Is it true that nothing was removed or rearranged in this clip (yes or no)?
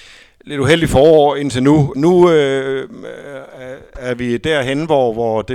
no